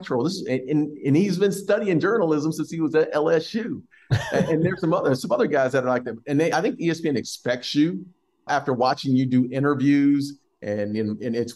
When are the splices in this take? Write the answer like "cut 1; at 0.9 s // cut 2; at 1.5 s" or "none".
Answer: cut 1; at 8.5 s